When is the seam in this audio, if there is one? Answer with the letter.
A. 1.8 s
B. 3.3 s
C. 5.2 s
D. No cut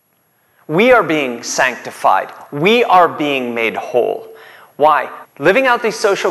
C